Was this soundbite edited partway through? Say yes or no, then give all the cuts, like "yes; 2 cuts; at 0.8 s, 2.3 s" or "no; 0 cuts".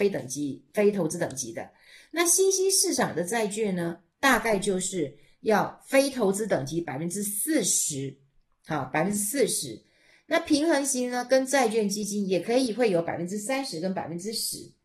no; 0 cuts